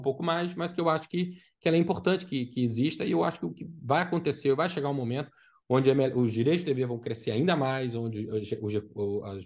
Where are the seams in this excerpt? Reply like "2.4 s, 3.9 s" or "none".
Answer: none

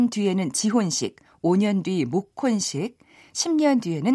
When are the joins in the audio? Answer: none

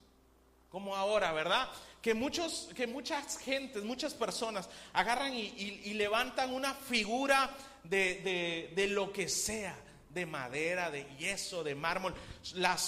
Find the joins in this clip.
none

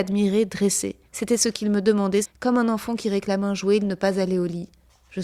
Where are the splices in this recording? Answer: 1.0 s, 2.2 s, 3.8 s

